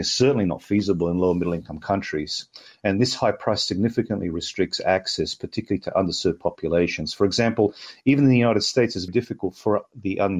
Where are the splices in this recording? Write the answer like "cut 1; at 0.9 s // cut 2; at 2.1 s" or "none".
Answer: cut 1; at 9.1 s